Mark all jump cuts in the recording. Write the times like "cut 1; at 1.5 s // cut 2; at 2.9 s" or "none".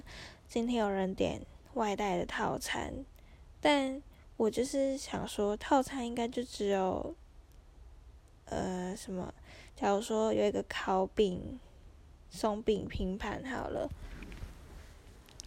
none